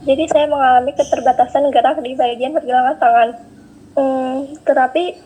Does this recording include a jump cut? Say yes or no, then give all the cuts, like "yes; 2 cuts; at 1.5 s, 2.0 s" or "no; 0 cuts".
yes; 1 cut; at 3.9 s